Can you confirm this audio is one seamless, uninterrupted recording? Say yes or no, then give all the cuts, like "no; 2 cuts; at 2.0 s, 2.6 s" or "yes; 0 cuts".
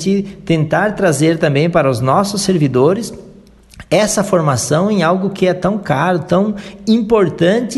yes; 0 cuts